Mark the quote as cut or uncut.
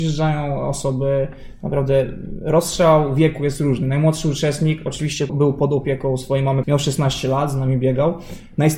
cut